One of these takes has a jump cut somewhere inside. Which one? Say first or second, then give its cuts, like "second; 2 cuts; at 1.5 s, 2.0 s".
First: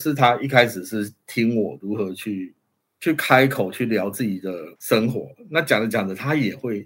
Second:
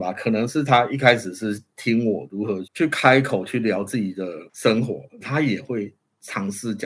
second; 2 cuts; at 2.6 s, 5.2 s